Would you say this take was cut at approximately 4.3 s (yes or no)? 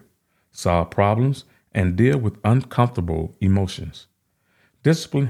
no